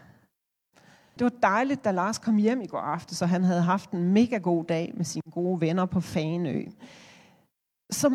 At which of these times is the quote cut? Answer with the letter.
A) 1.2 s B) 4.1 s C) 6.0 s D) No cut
A